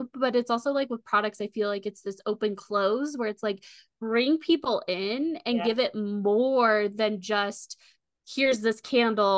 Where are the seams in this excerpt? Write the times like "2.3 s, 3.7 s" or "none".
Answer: none